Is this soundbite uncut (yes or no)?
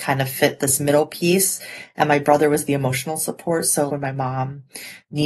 no